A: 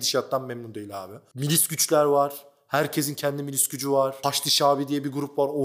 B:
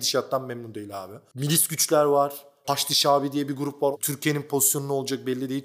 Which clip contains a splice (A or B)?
B